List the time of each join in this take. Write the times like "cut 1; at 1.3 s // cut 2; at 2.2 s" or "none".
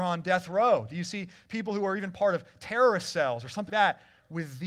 cut 1; at 3.7 s